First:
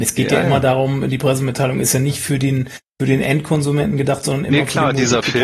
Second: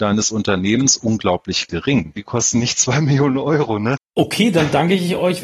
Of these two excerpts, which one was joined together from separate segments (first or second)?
second